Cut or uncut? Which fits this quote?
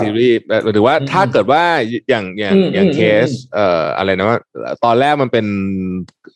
uncut